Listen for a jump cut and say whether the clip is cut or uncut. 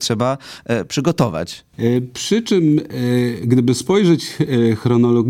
cut